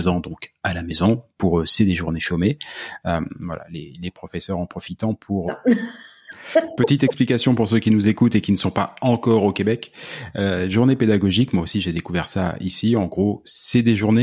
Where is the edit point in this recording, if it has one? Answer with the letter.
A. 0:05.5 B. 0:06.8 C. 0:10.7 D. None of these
A